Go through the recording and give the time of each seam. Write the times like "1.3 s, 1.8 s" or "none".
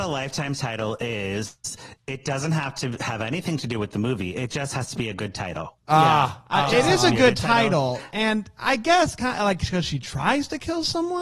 none